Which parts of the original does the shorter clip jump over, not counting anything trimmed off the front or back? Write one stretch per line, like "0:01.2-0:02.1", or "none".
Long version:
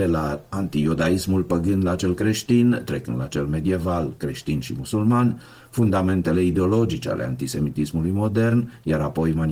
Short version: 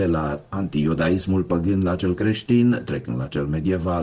none